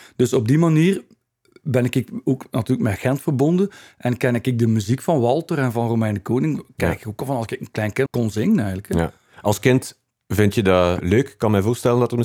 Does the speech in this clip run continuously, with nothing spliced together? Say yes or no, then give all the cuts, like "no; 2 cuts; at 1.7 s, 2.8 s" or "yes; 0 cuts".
no; 2 cuts; at 8.1 s, 11.0 s